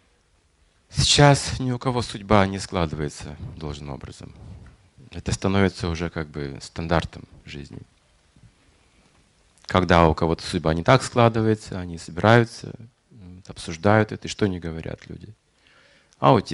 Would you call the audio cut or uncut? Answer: uncut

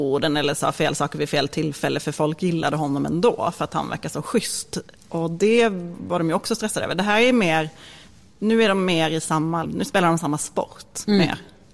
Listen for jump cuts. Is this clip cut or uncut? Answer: cut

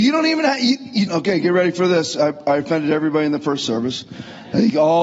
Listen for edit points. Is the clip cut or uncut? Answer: cut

